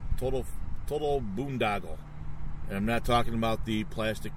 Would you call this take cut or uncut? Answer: uncut